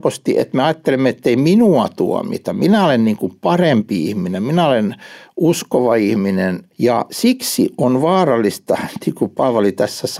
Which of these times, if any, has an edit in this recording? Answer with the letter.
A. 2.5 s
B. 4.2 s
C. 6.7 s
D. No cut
C